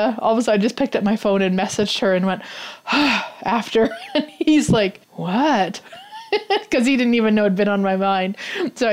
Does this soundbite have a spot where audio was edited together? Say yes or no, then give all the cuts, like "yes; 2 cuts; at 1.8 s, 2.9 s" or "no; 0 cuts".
yes; 1 cut; at 5.0 s